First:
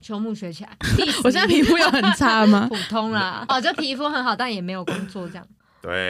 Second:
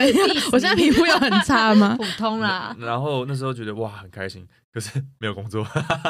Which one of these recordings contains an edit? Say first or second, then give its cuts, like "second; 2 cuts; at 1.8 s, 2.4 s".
first; 2 cuts; at 1.0 s, 3.5 s